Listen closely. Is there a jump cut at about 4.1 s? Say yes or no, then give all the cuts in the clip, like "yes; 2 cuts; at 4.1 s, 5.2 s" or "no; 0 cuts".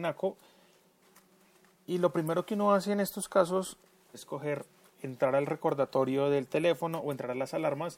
yes; 1 cut; at 4.1 s